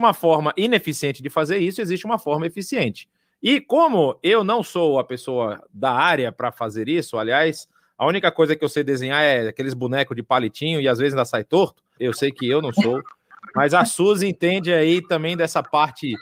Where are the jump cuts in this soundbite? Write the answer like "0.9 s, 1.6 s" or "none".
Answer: 12.0 s